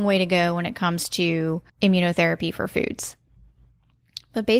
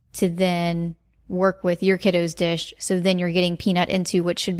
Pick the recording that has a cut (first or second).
first